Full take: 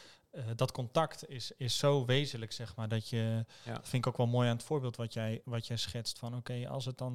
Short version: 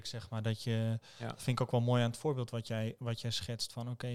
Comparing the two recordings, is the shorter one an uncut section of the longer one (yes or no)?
yes